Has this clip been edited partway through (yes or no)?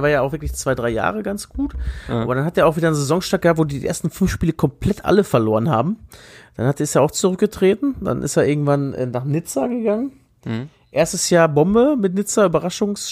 no